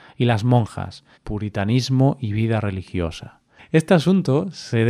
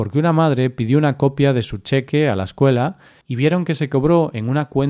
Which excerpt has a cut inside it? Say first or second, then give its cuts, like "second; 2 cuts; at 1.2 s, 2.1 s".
first; 2 cuts; at 1.2 s, 3.6 s